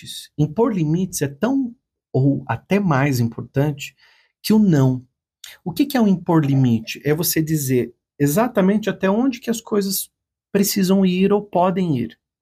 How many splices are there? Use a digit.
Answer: 0